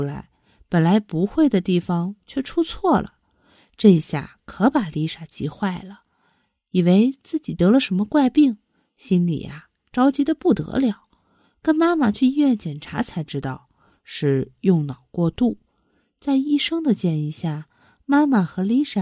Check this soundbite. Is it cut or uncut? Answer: uncut